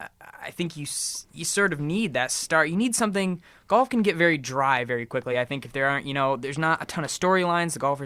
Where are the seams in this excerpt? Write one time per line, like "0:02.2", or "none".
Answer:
none